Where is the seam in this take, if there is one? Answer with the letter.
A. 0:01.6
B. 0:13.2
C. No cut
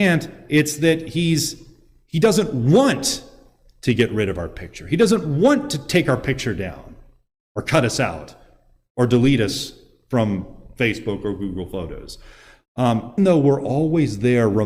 B